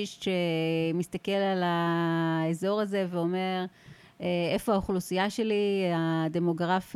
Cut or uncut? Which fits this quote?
uncut